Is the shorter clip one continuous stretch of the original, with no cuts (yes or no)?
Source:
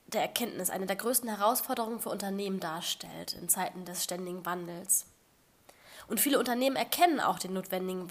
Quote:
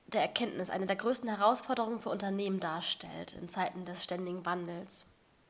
yes